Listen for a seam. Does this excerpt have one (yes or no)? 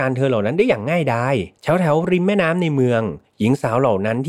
yes